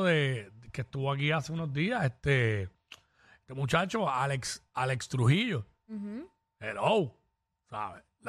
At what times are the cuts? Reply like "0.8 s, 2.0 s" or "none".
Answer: none